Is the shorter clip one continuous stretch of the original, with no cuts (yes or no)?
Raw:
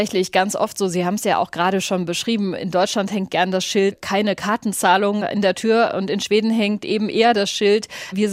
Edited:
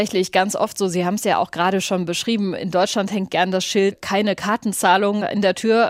yes